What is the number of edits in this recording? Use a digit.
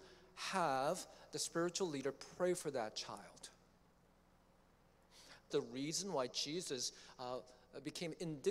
1